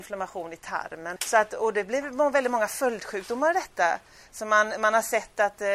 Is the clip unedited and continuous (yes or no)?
no